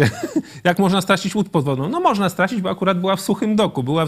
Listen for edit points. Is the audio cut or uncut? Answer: uncut